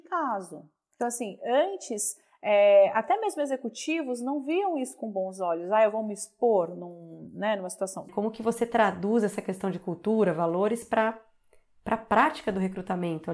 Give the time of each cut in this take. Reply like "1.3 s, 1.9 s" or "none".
8.1 s

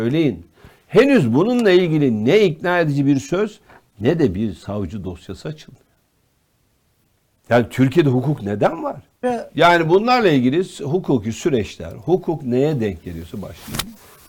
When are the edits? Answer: 9.2 s

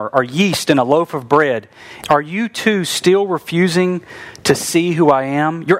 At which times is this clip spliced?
2.0 s

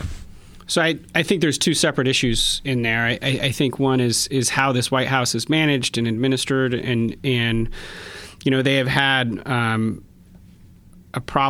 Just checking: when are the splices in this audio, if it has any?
none

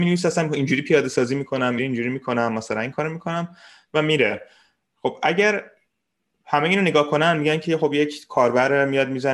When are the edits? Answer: 1.8 s

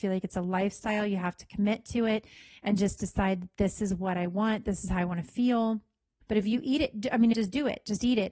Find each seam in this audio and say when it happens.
6.2 s, 7.3 s

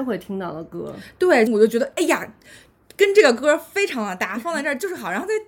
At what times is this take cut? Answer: 1.5 s

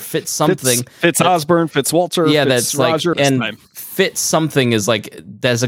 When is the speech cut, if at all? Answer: 3.1 s

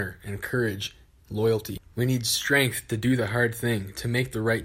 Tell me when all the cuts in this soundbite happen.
none

